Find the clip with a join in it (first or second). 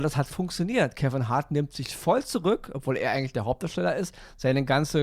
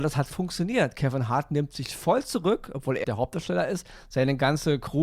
second